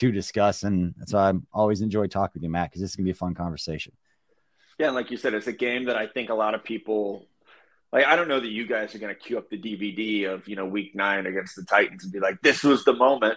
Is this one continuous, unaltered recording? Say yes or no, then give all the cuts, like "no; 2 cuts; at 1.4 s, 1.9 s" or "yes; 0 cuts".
yes; 0 cuts